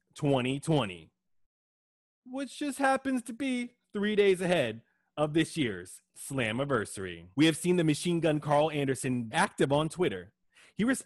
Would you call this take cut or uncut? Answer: cut